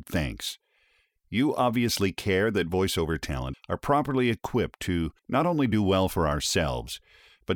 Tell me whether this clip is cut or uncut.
cut